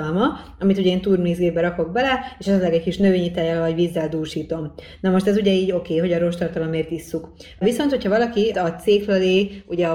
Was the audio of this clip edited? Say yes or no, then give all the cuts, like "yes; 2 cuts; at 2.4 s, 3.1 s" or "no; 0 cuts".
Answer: yes; 1 cut; at 8.5 s